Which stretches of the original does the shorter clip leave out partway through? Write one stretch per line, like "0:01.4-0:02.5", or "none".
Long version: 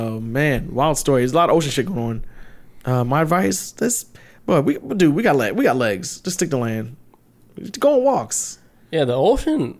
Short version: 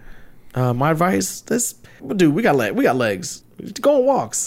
0:04.3-0:04.8
0:06.2-0:07.4